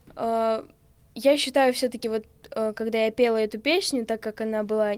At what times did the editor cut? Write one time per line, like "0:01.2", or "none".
none

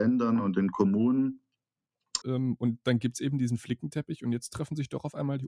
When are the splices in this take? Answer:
0:02.2

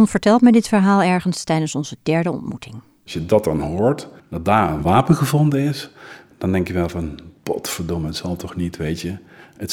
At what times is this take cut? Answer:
0:04.2
0:07.4

